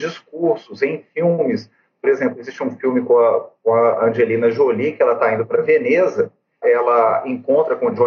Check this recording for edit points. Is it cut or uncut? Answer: cut